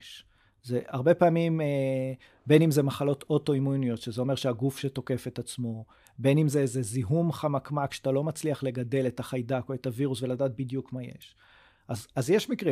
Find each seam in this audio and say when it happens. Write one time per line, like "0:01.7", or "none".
none